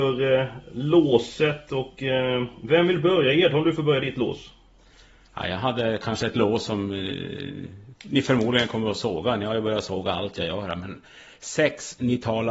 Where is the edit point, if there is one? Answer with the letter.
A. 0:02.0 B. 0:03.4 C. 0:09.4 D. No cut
D